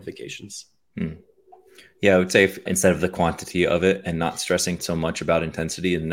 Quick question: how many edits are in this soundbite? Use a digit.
2